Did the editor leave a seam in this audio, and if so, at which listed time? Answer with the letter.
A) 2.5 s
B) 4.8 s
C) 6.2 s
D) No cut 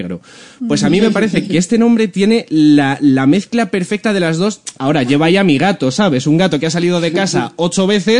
B